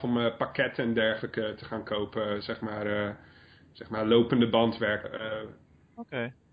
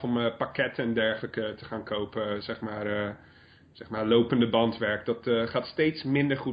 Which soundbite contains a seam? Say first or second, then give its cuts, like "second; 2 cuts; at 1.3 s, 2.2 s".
first; 1 cut; at 5.0 s